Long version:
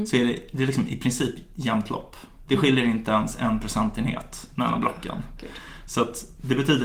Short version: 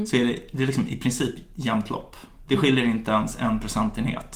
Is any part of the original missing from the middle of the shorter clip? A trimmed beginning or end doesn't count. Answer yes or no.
no